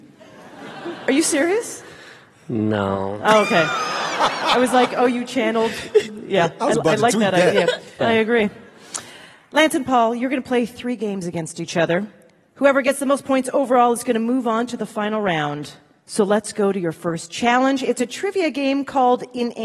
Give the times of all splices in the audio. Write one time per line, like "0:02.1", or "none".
0:08.0